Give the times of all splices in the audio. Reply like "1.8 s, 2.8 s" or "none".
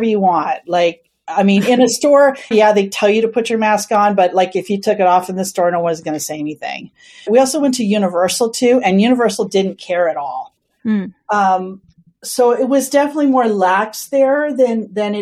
2.5 s, 7.3 s, 10.8 s